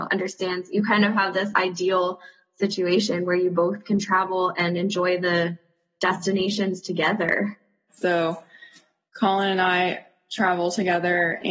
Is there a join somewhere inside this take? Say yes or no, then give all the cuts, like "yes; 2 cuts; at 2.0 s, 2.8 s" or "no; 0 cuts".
yes; 1 cut; at 7.9 s